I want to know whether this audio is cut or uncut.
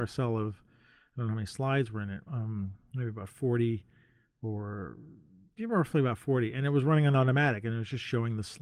uncut